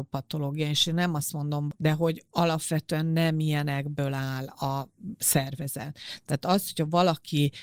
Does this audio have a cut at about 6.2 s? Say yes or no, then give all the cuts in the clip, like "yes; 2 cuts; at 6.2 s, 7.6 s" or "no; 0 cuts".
no; 1 cut; at 1.7 s